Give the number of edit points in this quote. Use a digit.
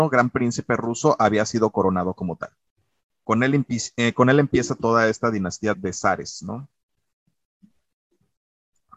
1